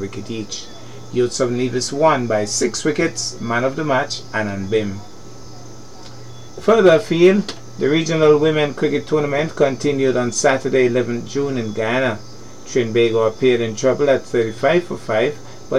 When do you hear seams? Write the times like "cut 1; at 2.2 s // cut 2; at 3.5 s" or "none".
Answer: none